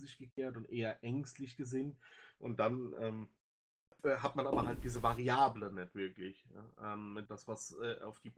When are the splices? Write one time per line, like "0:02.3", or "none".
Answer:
0:02.4
0:07.3